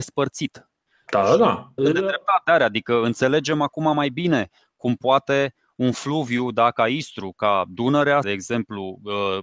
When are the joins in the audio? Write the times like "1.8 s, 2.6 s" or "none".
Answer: 1.8 s, 8.2 s